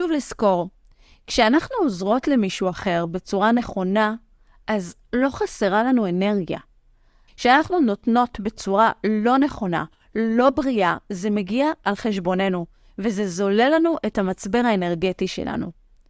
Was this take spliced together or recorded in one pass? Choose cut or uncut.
cut